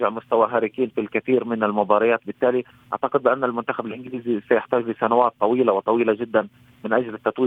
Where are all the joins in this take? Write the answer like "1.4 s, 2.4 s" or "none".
none